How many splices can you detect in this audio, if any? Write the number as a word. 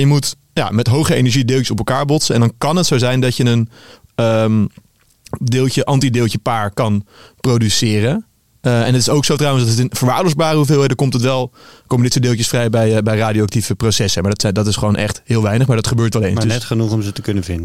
zero